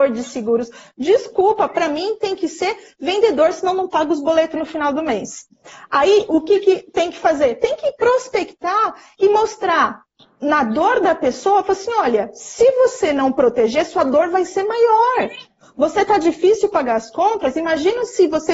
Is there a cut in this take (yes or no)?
no